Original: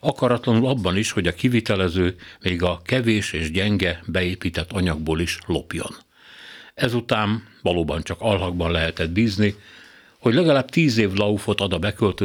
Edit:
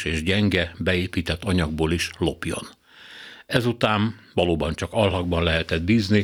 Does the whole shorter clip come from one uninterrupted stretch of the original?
yes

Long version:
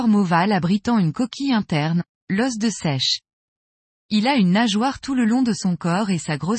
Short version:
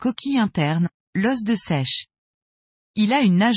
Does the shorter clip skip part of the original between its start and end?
no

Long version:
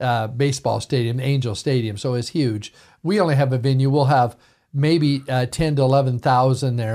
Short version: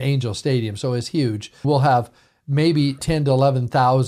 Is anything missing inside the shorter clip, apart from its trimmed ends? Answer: yes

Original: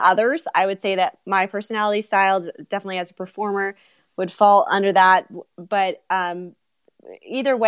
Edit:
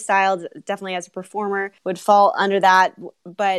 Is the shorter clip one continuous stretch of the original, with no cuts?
no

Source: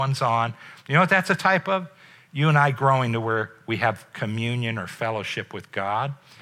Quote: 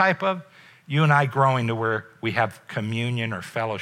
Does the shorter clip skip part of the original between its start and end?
no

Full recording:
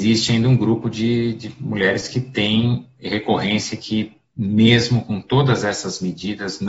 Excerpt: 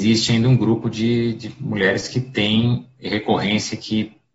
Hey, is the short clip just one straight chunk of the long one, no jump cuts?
yes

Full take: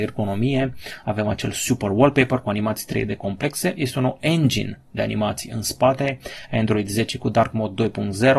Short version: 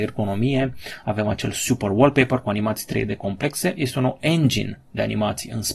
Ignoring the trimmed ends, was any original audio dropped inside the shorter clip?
no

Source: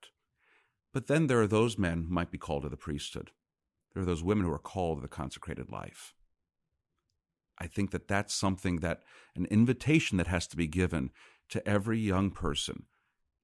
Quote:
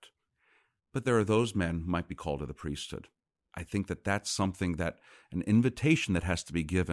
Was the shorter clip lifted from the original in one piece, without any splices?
no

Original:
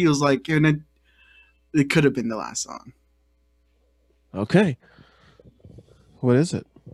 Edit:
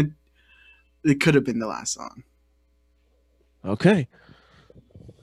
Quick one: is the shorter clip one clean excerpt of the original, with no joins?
yes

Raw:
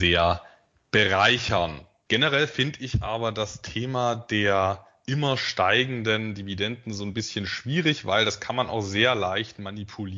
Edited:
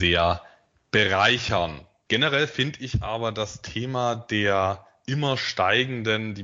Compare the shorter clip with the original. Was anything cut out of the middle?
no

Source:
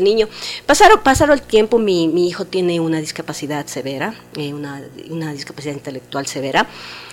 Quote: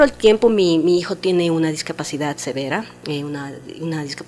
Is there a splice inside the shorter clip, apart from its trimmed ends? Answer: no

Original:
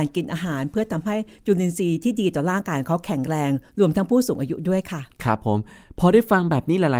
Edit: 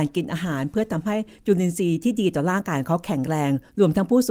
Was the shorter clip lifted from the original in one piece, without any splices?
yes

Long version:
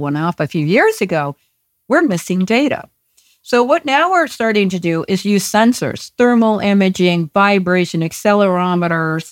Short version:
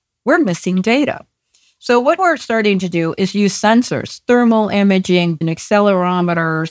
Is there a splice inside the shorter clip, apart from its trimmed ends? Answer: yes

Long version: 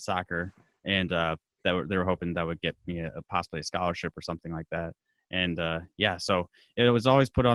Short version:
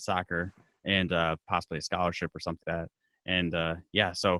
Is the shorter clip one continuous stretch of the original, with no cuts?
no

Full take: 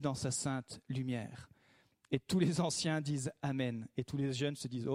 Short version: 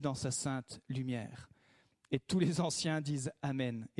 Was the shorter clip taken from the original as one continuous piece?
yes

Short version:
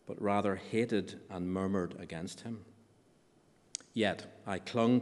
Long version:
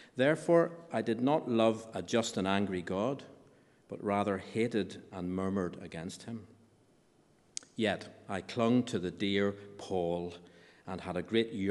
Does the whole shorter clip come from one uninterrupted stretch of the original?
yes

